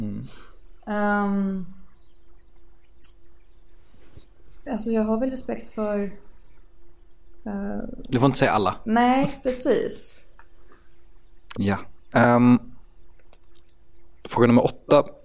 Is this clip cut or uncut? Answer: cut